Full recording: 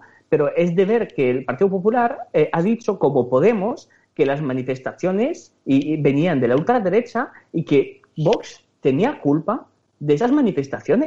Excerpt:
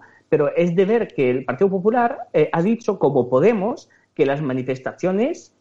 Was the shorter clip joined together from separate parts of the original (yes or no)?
no